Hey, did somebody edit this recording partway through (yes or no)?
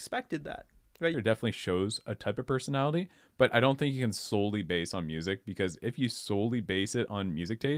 yes